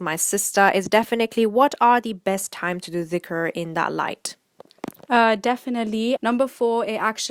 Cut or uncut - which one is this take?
cut